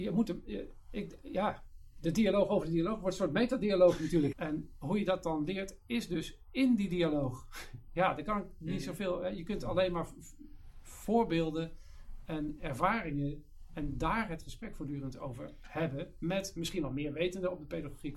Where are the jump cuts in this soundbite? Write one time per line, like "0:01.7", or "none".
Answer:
0:04.3